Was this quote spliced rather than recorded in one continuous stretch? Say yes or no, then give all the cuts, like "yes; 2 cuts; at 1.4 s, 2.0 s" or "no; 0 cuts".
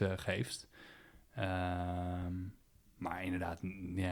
no; 0 cuts